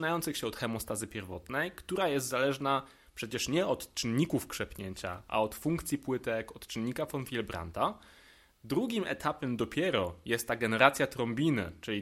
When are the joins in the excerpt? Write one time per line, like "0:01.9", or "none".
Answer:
none